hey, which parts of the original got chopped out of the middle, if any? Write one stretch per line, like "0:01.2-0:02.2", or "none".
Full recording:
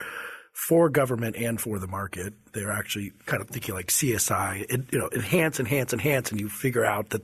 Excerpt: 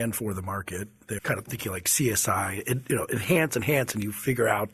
0:02.6-0:03.2
0:05.5-0:05.9